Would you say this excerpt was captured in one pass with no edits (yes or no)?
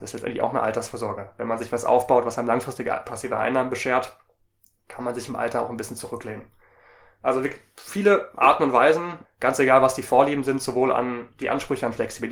no